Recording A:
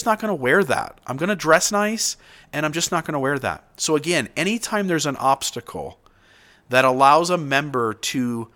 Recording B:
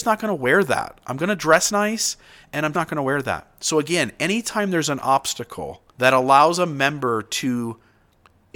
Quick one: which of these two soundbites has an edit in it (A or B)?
B